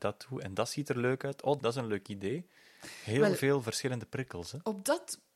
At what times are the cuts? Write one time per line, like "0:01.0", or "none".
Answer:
0:01.6